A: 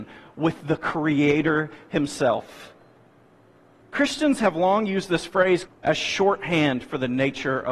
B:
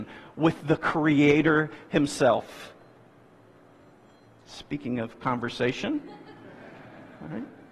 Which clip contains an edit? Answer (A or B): A